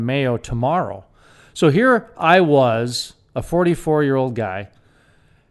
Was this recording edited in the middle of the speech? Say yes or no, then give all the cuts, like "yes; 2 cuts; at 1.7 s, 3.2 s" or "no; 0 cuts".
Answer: no; 0 cuts